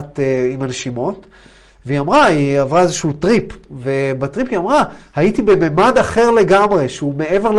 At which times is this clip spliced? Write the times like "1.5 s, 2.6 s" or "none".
none